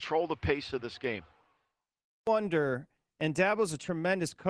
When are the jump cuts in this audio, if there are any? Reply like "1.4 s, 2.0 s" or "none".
none